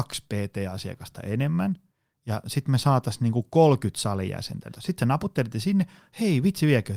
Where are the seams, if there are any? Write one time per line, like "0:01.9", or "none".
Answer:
0:04.7